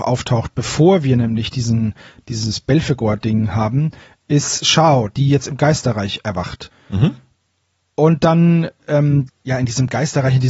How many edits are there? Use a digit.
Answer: 2